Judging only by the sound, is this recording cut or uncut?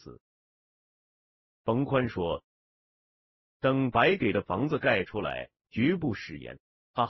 cut